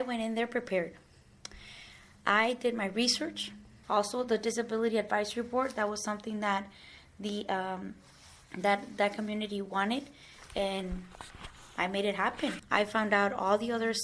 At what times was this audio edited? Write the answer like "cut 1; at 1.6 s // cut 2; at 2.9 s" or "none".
cut 1; at 3.8 s // cut 2; at 12.6 s